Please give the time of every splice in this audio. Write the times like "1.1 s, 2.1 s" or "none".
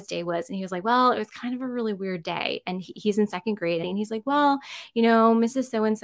3.8 s